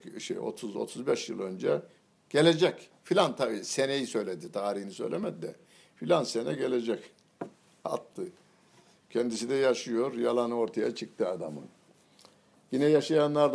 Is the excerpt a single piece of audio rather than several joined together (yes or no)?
yes